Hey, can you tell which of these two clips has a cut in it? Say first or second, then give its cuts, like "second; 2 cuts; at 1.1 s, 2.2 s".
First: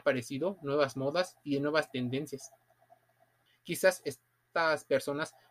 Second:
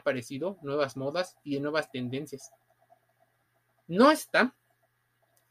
first; 1 cut; at 3.5 s